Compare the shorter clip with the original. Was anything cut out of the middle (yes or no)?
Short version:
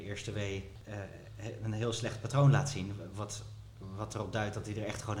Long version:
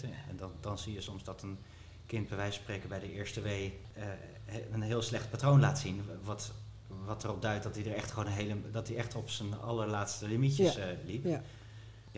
no